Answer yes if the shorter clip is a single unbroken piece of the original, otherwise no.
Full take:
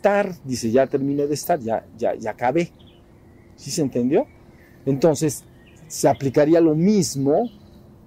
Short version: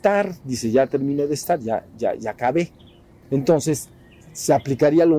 no